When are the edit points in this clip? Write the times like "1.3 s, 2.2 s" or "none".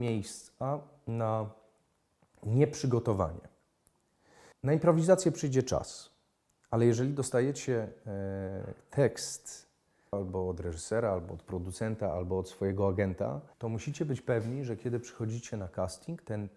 4.5 s, 10.1 s, 13.5 s